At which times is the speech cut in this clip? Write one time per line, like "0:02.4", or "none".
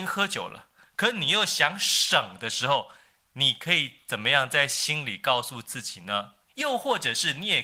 0:06.5